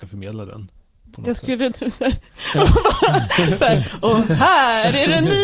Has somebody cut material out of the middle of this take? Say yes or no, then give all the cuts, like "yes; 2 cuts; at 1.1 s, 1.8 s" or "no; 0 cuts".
yes; 1 cut; at 1.7 s